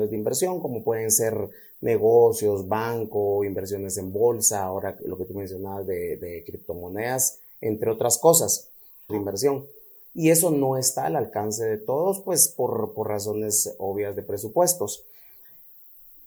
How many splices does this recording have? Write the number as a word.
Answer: two